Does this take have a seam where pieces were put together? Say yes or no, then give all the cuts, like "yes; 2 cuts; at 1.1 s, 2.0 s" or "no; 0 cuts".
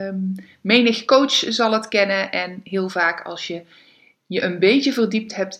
no; 0 cuts